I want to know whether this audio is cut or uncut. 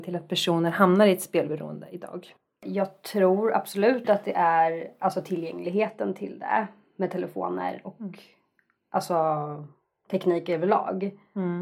uncut